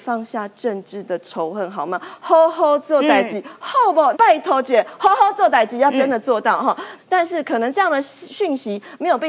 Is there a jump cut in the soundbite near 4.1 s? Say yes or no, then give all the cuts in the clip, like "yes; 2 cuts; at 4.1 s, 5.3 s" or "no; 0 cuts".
yes; 2 cuts; at 4.1 s, 7.0 s